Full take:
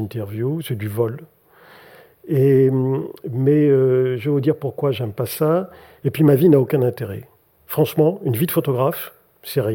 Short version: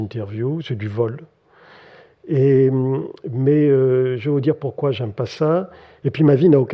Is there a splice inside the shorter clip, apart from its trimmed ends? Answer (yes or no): no